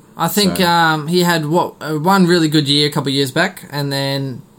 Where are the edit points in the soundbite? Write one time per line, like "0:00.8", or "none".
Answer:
none